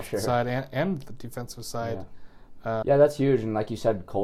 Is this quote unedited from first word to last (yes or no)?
no